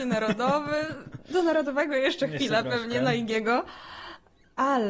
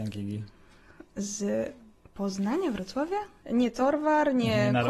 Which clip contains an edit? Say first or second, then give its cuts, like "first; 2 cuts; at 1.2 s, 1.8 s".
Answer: second; 1 cut; at 3.4 s